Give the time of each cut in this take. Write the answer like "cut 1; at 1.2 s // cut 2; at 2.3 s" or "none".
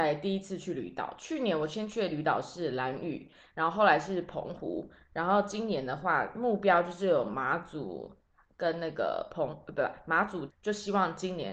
cut 1; at 10.5 s